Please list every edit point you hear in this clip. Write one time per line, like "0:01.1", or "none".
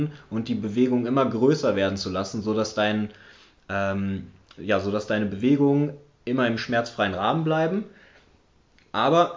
none